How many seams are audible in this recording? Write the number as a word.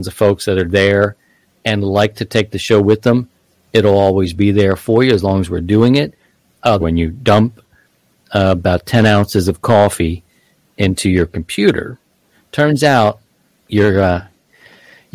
one